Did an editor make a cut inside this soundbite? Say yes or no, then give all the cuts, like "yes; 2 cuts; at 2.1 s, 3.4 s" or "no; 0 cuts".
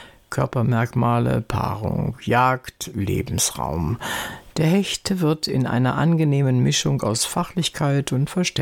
no; 0 cuts